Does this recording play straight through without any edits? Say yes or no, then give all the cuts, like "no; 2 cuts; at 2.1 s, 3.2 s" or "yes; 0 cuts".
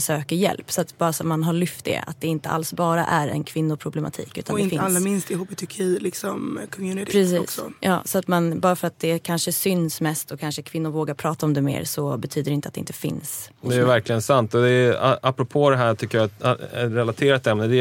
yes; 0 cuts